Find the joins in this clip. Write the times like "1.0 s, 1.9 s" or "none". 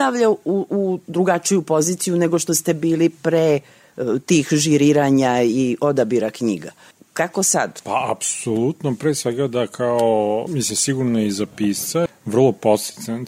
7.8 s, 10.5 s, 12.1 s